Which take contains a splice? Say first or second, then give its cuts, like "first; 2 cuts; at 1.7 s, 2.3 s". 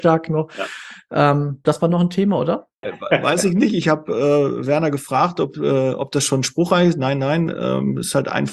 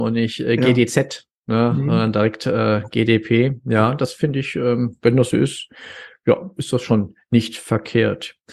first; 2 cuts; at 1.6 s, 2.8 s